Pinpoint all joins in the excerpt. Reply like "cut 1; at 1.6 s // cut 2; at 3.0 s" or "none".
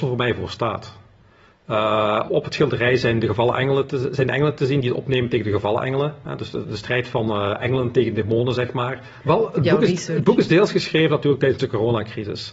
cut 1; at 2.3 s // cut 2; at 9.2 s